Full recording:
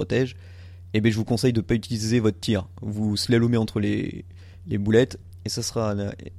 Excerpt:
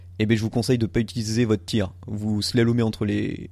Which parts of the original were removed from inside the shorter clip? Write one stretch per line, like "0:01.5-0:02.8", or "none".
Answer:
none